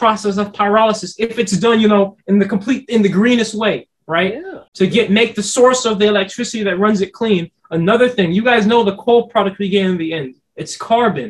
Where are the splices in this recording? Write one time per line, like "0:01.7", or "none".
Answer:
0:04.7